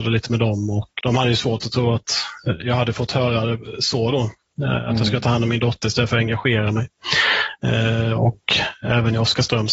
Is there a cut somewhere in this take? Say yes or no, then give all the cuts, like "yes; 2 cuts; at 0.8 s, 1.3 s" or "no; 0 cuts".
yes; 2 cuts; at 1.0 s, 8.1 s